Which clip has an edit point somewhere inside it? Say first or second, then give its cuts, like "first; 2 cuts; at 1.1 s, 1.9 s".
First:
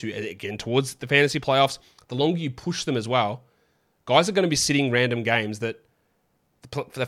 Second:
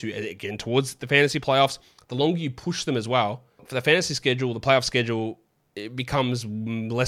second; 1 cut; at 3.6 s